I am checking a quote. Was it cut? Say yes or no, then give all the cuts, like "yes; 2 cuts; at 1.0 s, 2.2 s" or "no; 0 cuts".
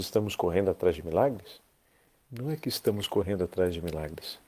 yes; 1 cut; at 2.2 s